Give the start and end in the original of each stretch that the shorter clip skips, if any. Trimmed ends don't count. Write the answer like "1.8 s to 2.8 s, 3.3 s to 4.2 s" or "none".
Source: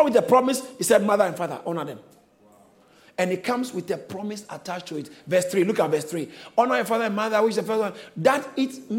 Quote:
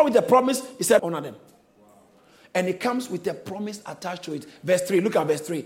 1.0 s to 1.6 s